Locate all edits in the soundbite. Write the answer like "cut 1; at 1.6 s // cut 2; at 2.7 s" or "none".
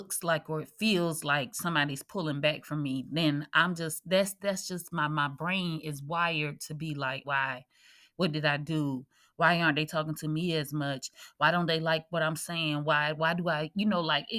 cut 1; at 7.2 s